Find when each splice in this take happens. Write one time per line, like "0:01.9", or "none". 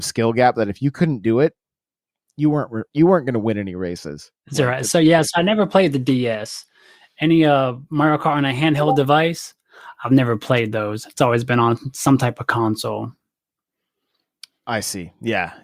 0:04.4